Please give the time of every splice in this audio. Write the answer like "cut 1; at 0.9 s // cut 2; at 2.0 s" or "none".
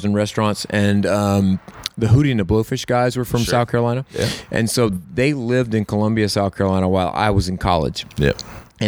none